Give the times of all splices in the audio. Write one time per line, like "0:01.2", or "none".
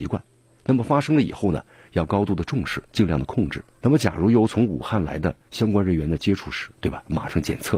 0:03.8
0:05.4
0:06.7